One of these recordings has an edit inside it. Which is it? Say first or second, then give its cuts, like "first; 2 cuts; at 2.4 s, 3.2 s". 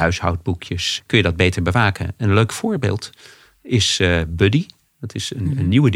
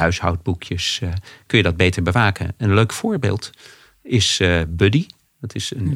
first; 1 cut; at 1.0 s